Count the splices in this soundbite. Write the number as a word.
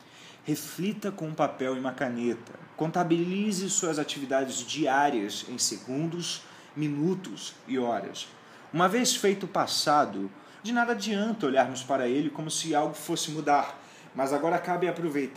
three